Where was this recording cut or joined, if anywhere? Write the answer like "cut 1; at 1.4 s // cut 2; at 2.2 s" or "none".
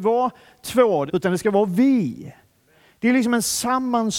cut 1; at 1.1 s